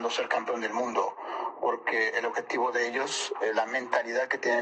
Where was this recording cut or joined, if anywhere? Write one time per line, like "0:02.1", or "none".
none